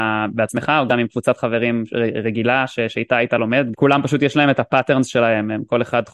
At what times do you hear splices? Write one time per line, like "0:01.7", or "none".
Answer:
0:03.7